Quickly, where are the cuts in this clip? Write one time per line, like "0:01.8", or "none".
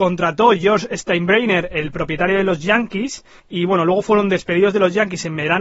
0:03.4